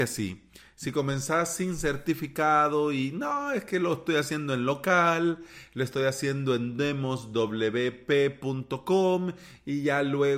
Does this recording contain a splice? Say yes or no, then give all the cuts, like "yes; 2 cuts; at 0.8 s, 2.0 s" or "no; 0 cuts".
no; 0 cuts